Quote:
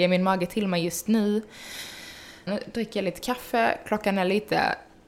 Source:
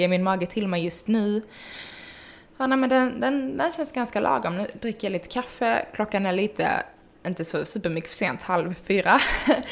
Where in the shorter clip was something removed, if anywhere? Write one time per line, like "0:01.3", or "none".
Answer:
0:02.5